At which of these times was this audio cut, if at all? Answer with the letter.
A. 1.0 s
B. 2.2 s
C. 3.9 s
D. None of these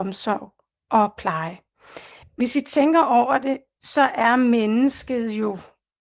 B